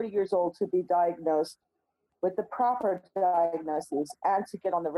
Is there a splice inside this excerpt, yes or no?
no